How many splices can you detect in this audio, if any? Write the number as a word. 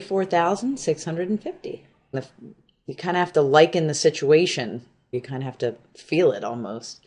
two